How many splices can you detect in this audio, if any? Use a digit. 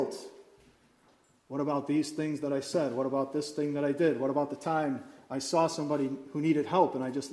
0